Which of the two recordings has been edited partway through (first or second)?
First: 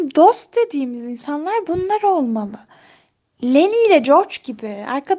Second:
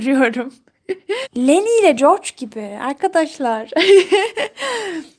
second